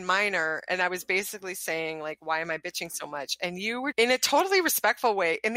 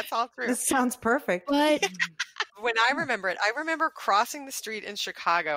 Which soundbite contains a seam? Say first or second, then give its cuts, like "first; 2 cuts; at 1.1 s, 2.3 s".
second; 1 cut; at 2.5 s